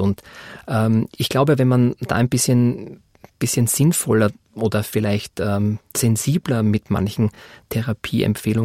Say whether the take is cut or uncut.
uncut